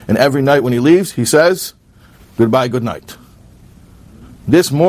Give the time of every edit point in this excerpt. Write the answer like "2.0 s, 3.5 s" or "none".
none